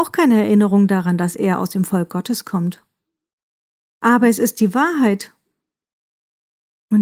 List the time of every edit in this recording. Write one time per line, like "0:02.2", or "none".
none